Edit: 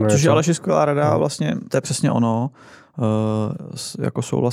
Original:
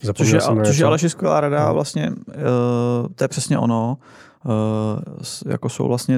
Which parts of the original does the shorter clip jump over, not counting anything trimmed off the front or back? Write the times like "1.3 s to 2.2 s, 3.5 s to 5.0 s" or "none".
2.2 s to 3.2 s